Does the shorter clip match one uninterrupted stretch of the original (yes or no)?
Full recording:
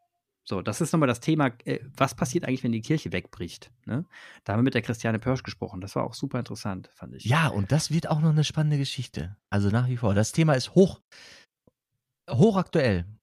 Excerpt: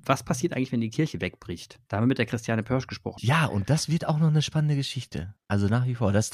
no